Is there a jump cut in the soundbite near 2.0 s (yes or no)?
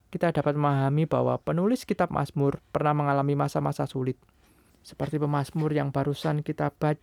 no